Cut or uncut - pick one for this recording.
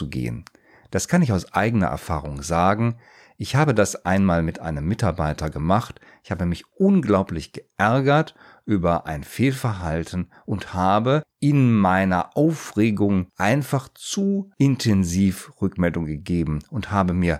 uncut